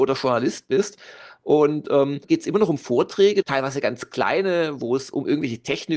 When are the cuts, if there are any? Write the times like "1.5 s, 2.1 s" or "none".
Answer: 2.2 s, 3.4 s